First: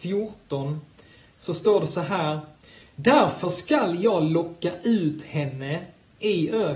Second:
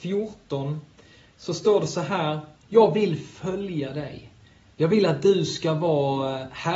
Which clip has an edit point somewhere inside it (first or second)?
second